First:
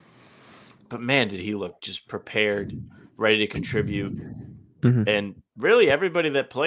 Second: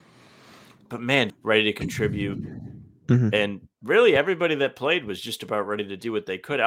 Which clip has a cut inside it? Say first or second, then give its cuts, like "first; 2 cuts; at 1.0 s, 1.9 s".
second; 1 cut; at 1.3 s